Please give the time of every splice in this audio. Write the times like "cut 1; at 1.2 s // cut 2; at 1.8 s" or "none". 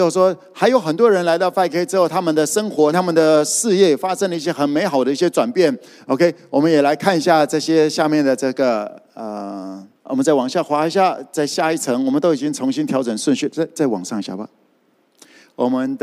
cut 1; at 2.9 s // cut 2; at 10.0 s